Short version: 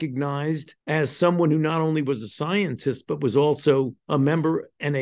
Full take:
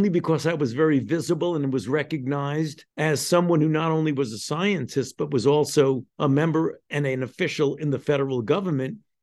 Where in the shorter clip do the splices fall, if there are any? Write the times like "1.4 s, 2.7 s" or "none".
none